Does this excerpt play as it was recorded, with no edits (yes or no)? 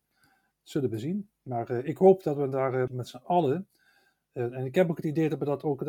no